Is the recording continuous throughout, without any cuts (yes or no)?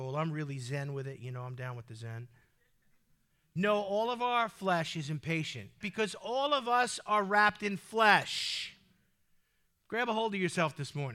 no